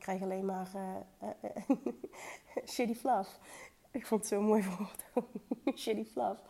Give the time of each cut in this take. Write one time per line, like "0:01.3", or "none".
none